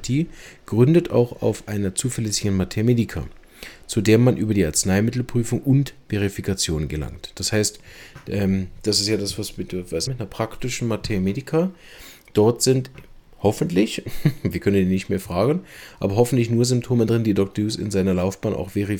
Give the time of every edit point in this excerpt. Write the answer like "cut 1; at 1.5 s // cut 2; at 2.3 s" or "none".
cut 1; at 10.1 s